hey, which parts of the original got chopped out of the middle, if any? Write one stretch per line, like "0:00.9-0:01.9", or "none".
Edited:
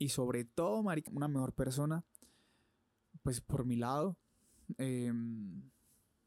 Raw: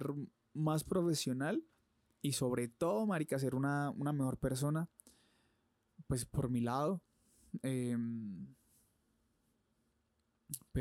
0:03.3-0:03.9